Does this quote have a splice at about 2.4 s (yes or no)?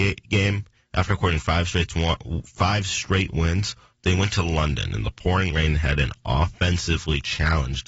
no